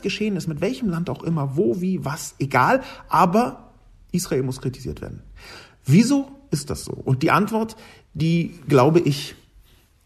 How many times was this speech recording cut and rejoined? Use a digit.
0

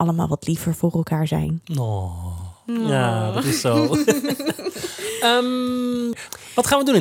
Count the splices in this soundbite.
0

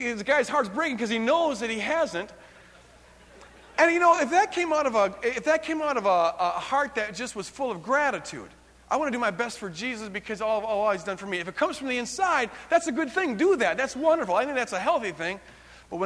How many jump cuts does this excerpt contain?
0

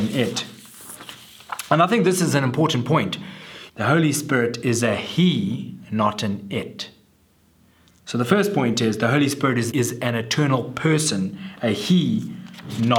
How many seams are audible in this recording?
2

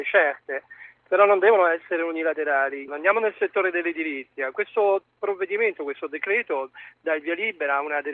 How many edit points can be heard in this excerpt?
1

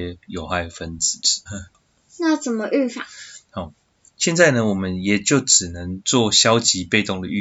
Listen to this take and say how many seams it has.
1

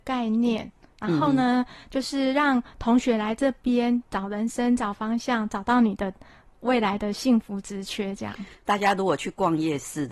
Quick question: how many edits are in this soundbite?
1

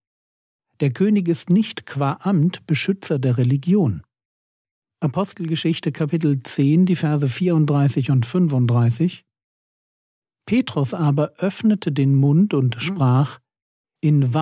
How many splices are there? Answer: 1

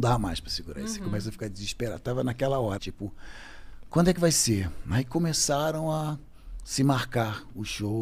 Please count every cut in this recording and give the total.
1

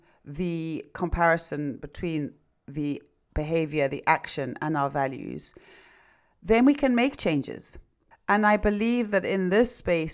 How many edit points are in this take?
1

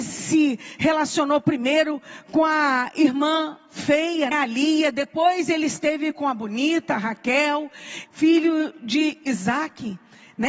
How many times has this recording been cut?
2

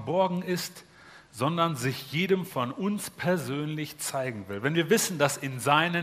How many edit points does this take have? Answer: 0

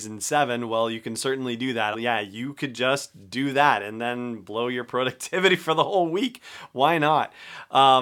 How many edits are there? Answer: 1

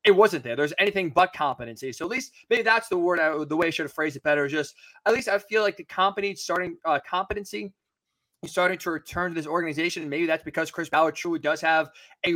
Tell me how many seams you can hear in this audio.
0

